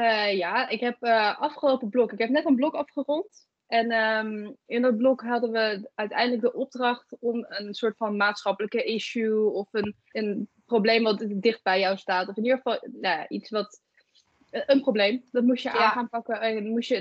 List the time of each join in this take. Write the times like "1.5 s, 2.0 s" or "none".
10.1 s